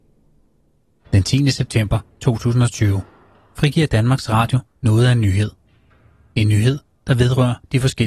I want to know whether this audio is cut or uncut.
uncut